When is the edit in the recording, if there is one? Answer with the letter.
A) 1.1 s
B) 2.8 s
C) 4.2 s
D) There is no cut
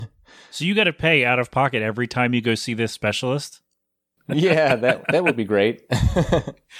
C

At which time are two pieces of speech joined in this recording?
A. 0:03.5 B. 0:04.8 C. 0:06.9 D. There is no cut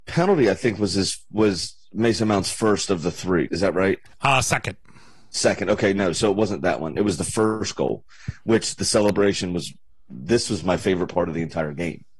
A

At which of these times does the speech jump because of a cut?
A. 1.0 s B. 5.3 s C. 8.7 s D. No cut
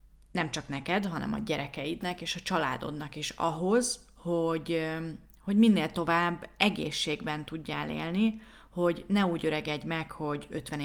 D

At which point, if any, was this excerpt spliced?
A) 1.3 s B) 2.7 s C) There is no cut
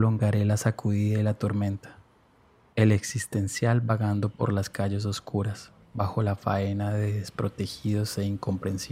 B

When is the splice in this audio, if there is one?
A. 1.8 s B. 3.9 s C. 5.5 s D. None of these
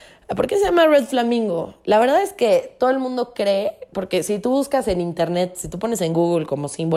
D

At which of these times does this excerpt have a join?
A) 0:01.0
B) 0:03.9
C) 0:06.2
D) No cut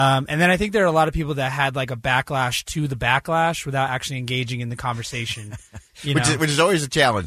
D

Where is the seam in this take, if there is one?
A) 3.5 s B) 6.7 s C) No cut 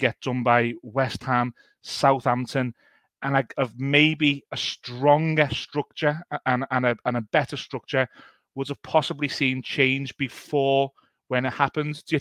A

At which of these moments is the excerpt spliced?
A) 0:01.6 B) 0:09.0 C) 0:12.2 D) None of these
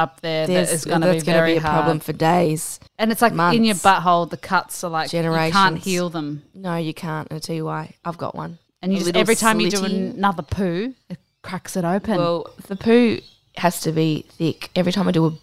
D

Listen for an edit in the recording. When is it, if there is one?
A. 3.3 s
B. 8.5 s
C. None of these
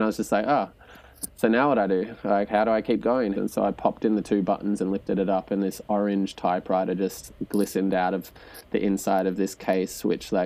A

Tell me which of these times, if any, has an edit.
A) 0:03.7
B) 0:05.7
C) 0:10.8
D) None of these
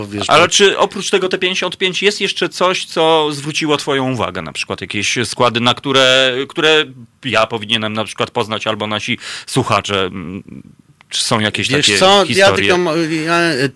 D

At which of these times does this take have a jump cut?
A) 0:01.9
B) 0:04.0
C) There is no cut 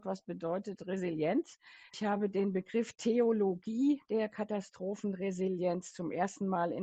A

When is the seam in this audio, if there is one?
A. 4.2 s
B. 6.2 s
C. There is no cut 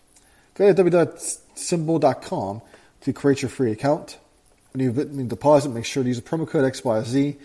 C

